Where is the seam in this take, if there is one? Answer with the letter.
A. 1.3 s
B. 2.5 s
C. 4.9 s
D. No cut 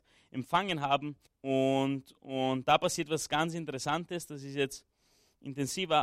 A